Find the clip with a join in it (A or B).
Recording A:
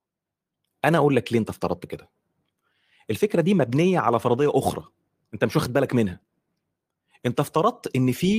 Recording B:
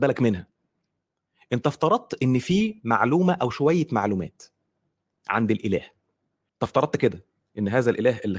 B